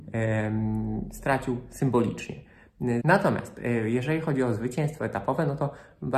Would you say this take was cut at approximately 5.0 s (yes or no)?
no